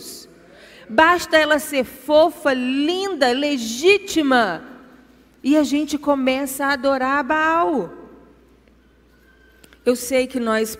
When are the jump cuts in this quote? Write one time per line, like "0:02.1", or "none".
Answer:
none